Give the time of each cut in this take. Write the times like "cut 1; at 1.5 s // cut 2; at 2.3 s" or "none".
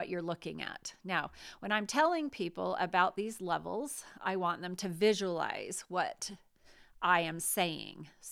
none